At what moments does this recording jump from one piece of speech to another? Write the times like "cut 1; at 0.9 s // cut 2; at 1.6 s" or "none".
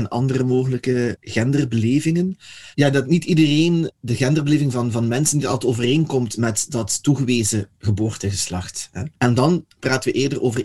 cut 1; at 9.2 s